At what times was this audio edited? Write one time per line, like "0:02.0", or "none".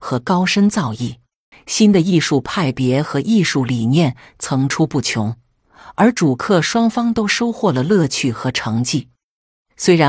0:01.5